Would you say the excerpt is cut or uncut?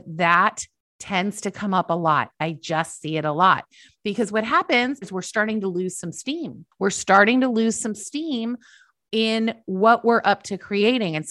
cut